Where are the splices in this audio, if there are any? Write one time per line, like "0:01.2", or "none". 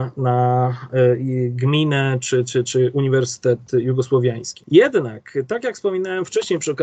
0:02.6